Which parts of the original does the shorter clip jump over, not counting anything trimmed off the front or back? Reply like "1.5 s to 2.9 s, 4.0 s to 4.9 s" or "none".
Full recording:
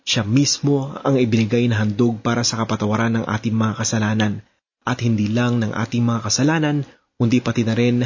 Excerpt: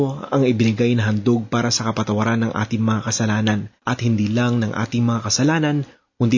4.5 s to 4.8 s

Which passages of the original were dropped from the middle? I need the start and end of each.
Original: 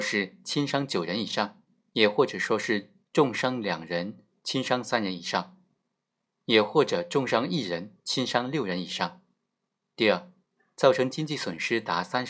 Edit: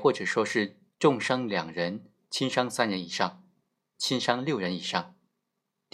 6.1 s to 8.0 s

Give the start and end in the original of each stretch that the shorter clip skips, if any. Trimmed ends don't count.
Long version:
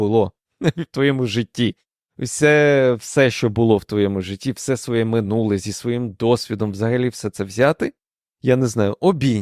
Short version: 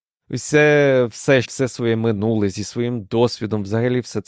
3.3 s to 4.5 s

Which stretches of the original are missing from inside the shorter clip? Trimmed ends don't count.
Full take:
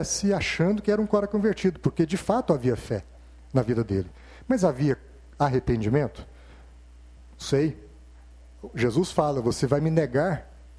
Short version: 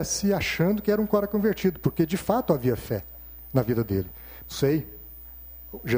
4.4 s to 7.3 s

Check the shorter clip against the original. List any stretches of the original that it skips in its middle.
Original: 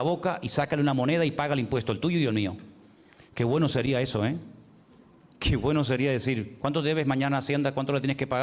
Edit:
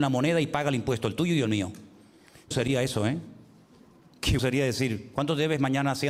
3.3 s to 3.7 s, 5.6 s to 5.8 s

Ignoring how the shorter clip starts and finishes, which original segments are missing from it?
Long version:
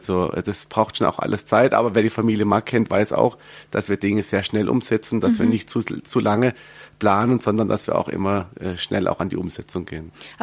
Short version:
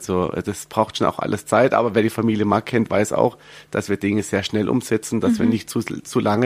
none

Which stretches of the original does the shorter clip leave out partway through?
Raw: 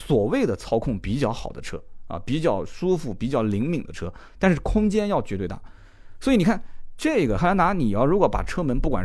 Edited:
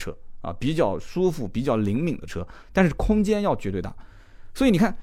none

